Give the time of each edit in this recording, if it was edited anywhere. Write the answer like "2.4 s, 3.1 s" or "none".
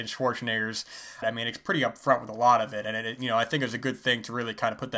1.2 s